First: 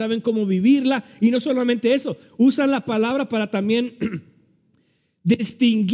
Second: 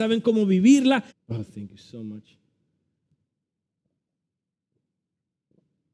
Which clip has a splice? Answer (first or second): second